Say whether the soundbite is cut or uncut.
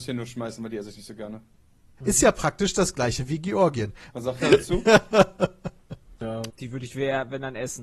cut